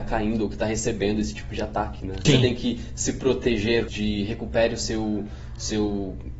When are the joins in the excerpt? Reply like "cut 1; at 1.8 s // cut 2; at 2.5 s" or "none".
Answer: cut 1; at 2.3 s // cut 2; at 3.9 s